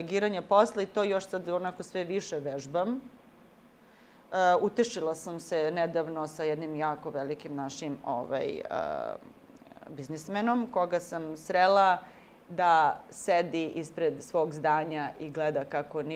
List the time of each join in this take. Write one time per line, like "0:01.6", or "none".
none